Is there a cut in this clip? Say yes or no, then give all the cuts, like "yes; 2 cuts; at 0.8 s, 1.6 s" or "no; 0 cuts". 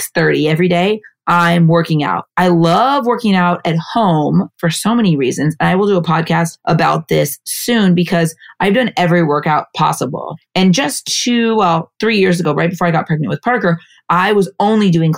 no; 0 cuts